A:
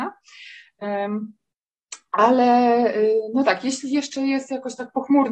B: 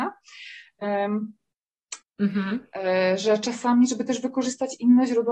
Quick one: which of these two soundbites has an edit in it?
B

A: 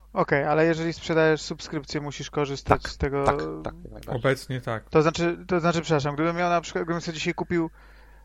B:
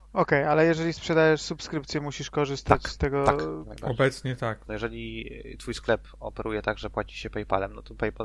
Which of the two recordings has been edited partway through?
B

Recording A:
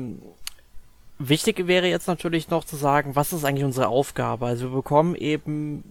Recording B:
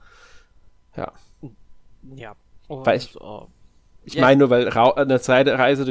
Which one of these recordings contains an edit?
B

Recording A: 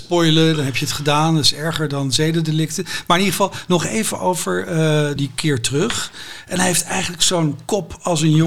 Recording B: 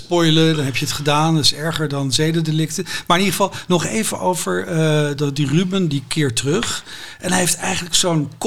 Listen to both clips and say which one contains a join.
A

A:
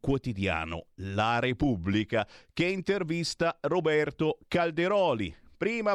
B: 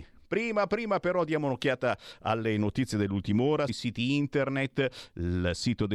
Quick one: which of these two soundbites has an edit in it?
B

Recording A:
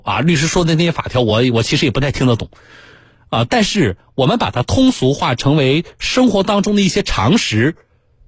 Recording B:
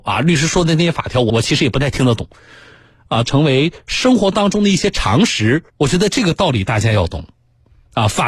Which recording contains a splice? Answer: B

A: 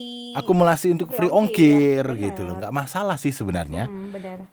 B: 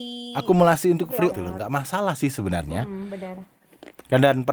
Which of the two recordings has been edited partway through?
B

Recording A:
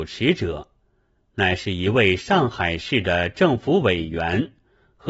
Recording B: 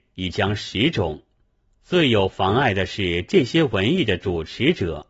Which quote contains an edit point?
B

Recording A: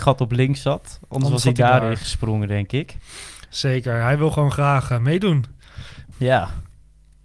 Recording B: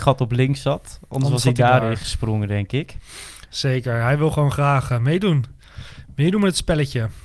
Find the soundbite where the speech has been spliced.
A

